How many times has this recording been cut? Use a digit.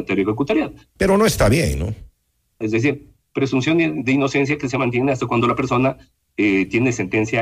2